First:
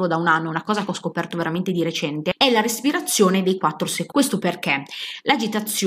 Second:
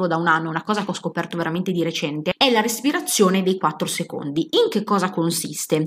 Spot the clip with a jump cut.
first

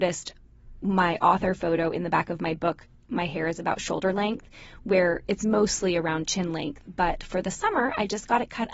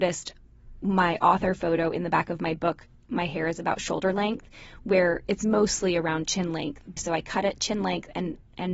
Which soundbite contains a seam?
second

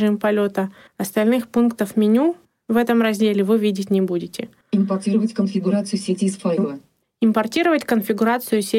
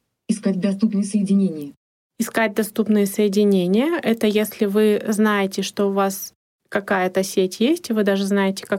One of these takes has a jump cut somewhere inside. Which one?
first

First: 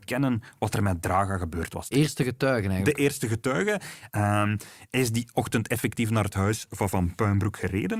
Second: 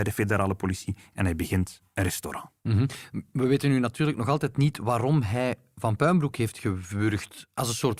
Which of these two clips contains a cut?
first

